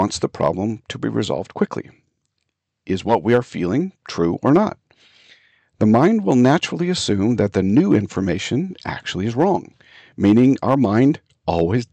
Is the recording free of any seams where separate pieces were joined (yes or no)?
yes